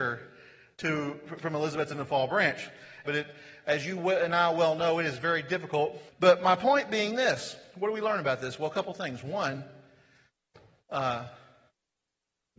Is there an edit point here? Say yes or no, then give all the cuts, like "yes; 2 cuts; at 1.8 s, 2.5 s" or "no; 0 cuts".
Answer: yes; 2 cuts; at 3.0 s, 6.1 s